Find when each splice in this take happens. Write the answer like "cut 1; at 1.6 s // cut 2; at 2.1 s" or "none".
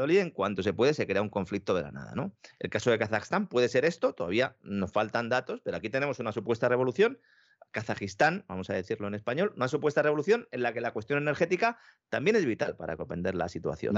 none